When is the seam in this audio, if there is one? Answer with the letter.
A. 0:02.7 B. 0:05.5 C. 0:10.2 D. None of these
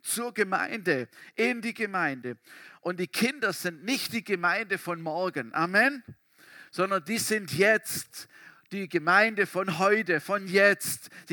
D